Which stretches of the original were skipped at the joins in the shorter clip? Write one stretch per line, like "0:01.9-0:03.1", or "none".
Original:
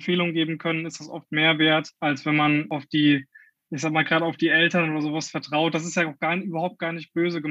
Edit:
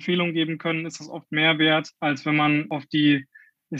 none